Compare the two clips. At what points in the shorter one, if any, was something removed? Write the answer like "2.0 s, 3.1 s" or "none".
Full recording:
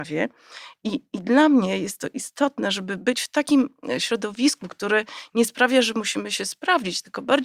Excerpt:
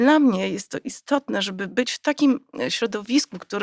none